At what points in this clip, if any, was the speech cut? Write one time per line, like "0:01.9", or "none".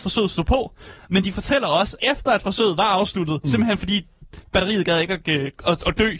0:02.0